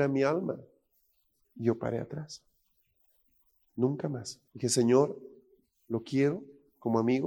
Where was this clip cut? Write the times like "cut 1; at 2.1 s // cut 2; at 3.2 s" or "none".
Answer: cut 1; at 1.4 s // cut 2; at 4.5 s